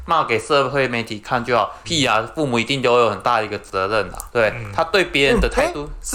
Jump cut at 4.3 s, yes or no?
yes